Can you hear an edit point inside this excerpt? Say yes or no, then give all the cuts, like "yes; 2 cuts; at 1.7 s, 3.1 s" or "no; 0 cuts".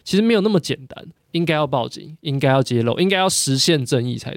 yes; 1 cut; at 1.2 s